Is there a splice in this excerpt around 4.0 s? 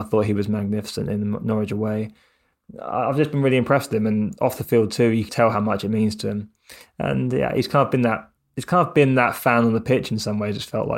no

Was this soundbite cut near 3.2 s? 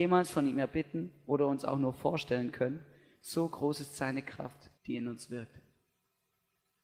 no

